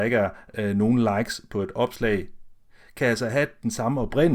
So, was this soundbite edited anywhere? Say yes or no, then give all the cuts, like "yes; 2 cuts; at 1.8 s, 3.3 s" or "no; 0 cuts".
no; 0 cuts